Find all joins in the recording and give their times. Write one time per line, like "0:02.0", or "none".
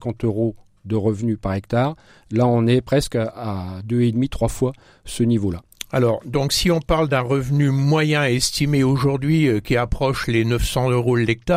none